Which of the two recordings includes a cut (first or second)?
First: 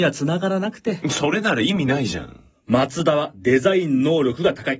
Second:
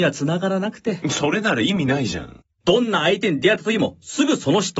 second